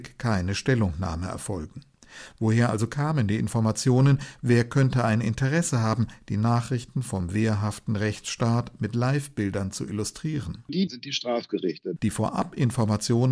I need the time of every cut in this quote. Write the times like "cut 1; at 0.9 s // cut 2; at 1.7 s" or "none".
cut 1; at 10.9 s // cut 2; at 12.0 s